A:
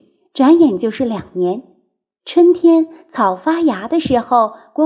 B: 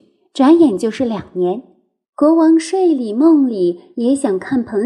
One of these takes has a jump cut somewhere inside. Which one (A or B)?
B